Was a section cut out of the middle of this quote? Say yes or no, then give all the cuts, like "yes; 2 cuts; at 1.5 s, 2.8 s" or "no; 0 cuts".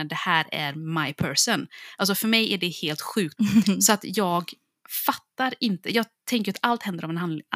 yes; 1 cut; at 3.4 s